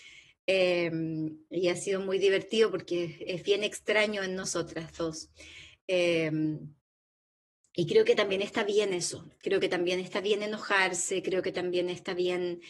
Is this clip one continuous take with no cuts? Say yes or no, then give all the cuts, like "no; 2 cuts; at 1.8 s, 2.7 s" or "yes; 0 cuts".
yes; 0 cuts